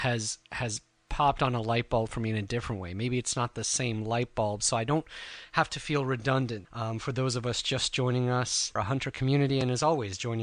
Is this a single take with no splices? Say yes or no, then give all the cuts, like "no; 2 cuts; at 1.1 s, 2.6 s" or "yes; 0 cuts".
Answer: no; 2 cuts; at 6.6 s, 8.8 s